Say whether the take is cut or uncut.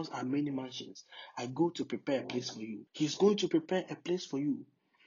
cut